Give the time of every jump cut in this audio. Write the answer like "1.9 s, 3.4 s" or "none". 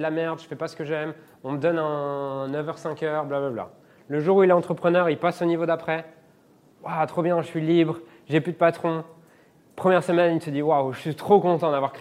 4.0 s